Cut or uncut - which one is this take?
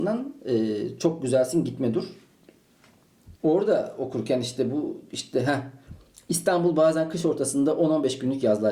cut